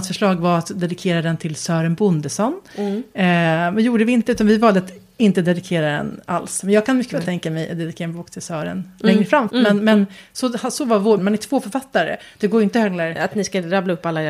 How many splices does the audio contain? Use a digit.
2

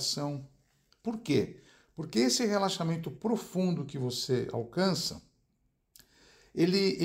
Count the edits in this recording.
1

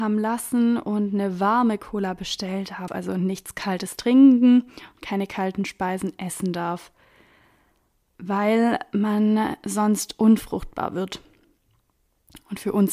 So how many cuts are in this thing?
1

